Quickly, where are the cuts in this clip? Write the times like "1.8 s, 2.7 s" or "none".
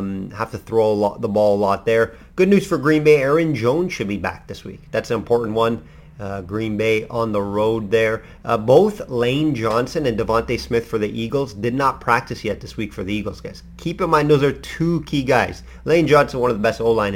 none